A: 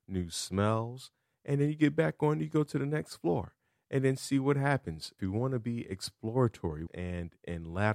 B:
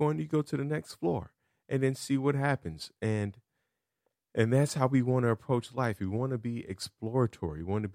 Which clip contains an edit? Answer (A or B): A